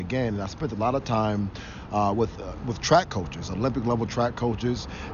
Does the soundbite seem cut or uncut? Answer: uncut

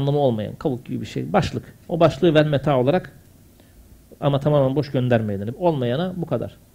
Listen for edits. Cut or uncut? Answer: cut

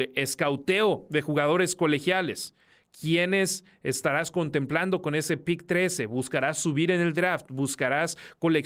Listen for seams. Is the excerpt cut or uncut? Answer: uncut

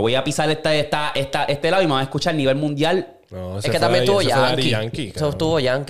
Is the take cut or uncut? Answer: uncut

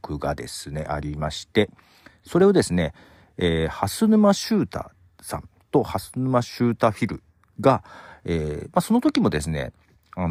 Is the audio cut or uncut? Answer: uncut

